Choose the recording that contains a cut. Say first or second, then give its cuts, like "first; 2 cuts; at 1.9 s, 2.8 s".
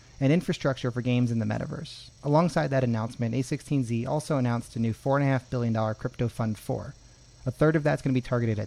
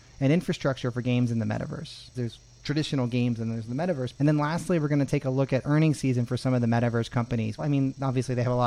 second; 3 cuts; at 2.1 s, 4.2 s, 7.6 s